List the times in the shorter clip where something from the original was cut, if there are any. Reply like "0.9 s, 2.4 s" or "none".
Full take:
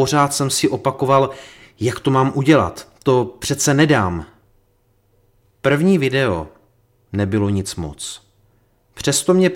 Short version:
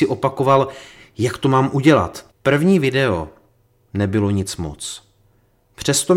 2.3 s